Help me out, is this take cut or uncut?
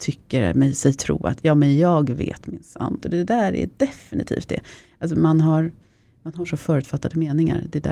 cut